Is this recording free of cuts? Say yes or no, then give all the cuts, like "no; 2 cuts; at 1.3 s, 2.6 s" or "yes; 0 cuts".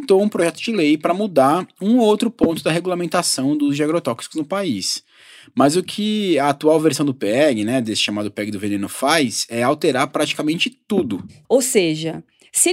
no; 1 cut; at 11.4 s